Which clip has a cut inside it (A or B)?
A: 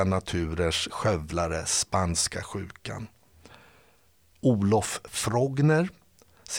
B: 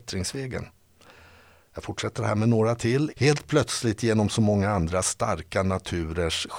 B